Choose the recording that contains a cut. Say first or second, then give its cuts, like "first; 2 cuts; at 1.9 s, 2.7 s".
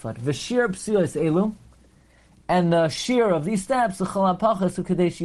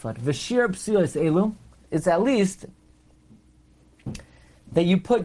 second; 1 cut; at 1.9 s